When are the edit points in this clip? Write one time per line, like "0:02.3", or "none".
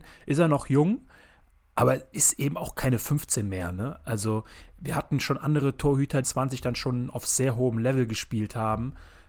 0:06.2